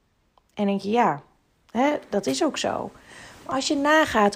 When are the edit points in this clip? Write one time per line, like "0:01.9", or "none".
none

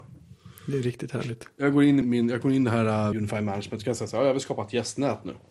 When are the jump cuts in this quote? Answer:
0:02.0
0:03.1

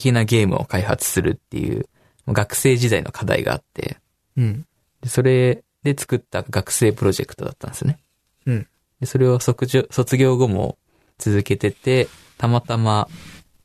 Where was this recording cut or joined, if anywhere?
none

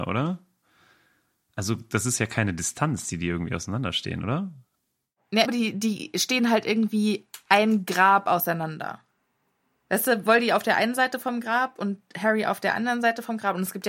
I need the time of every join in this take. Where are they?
0:05.4

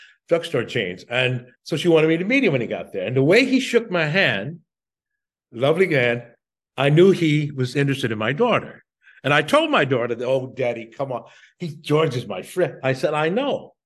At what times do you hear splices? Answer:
0:01.6

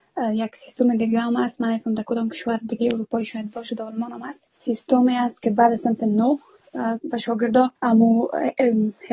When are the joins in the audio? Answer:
0:04.5
0:07.8

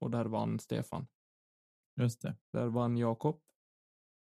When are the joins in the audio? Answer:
0:02.4

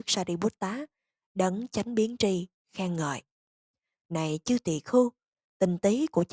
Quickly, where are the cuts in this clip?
none

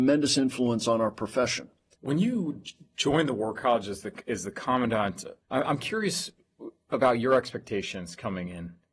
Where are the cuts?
0:01.9
0:05.4

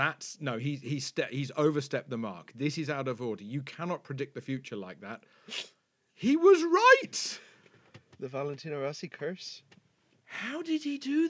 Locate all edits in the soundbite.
none

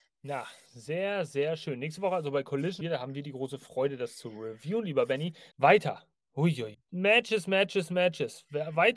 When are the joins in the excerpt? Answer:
0:02.8
0:05.5
0:06.7

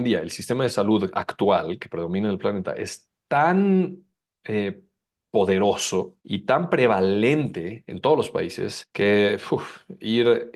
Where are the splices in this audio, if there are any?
none

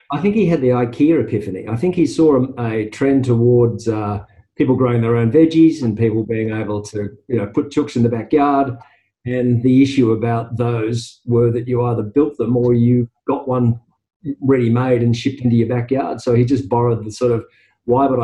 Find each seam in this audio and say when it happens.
none

